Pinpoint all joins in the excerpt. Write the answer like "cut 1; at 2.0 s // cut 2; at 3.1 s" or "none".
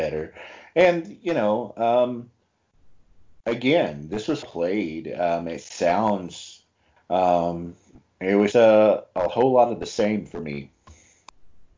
cut 1; at 4.4 s // cut 2; at 7.0 s // cut 3; at 8.5 s